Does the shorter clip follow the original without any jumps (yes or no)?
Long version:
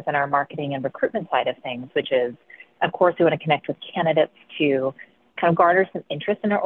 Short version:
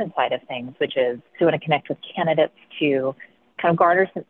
no